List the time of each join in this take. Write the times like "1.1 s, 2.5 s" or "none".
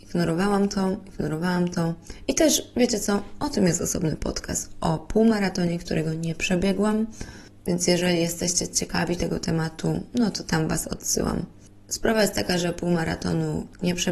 none